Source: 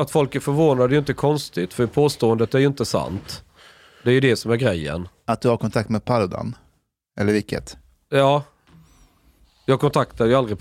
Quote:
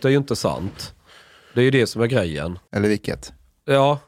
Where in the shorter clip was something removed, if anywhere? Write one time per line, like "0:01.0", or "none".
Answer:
0:02.7